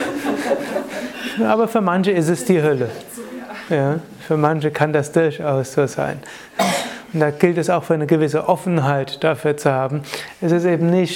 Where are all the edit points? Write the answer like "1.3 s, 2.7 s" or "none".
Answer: none